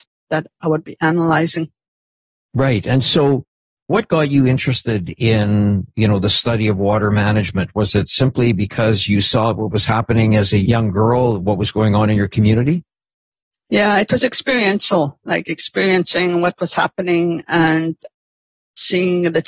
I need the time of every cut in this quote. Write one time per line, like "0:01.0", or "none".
none